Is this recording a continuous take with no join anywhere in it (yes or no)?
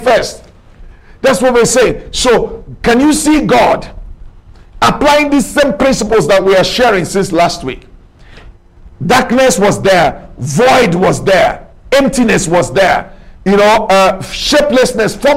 yes